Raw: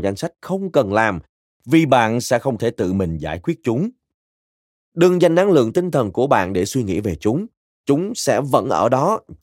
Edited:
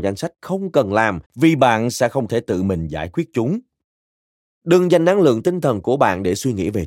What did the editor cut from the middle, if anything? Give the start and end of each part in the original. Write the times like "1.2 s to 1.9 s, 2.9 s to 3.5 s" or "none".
1.3 s to 1.6 s